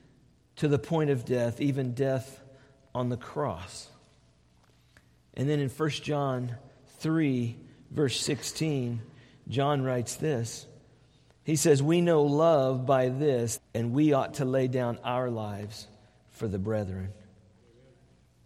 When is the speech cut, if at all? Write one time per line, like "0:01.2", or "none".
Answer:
0:13.6